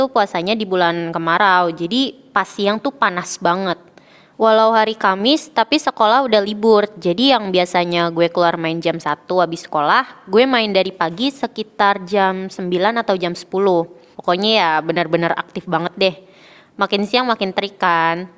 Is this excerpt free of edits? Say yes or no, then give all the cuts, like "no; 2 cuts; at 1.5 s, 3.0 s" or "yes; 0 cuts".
no; 1 cut; at 14.1 s